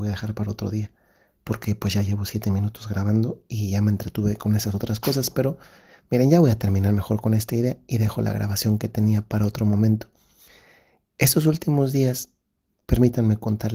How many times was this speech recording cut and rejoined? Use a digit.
0